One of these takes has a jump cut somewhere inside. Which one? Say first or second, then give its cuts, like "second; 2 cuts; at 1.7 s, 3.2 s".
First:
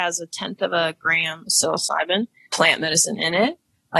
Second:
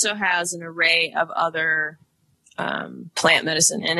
first; 1 cut; at 2.5 s